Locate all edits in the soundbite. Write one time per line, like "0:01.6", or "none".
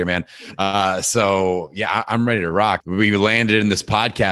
0:02.8